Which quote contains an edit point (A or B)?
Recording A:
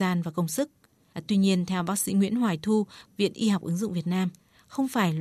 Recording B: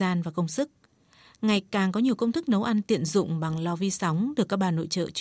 A